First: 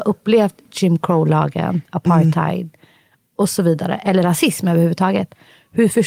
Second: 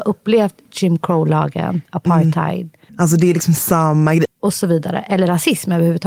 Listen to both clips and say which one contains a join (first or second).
second